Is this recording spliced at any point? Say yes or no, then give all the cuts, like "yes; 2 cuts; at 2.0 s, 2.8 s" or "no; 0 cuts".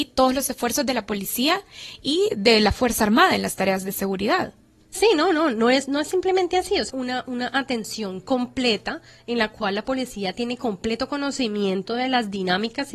yes; 1 cut; at 6.9 s